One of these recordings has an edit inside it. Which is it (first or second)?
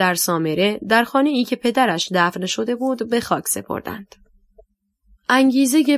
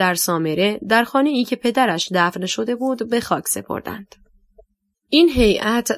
second